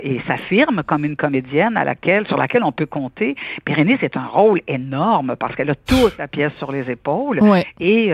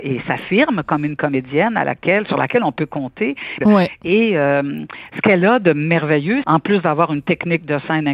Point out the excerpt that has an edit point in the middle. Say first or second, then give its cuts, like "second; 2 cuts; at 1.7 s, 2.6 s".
second; 2 cuts; at 3.6 s, 6.4 s